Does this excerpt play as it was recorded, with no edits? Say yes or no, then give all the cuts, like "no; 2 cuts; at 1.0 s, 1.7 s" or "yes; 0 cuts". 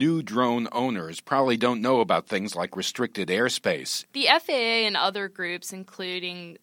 no; 1 cut; at 4.0 s